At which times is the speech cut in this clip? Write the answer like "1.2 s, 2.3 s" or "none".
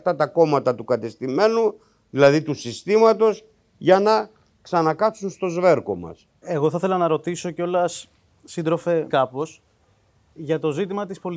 6.4 s, 9.1 s